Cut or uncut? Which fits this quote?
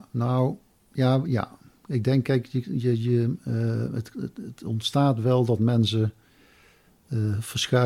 uncut